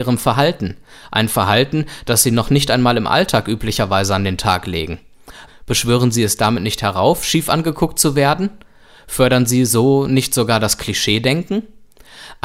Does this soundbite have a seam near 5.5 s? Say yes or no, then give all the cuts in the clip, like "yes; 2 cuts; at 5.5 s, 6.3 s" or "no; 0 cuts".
yes; 1 cut; at 5.5 s